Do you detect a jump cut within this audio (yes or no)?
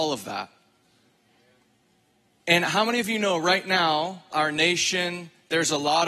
yes